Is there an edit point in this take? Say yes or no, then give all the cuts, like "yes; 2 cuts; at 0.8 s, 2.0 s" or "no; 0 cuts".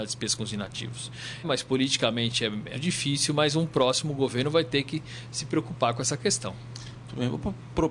yes; 2 cuts; at 1.4 s, 2.7 s